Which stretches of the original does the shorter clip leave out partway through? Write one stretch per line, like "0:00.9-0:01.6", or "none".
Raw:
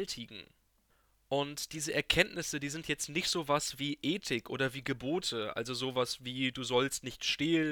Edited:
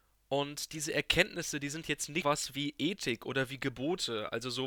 0:03.2-0:03.5